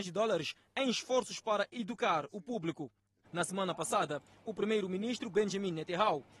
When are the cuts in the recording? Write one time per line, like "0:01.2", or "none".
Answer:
0:03.2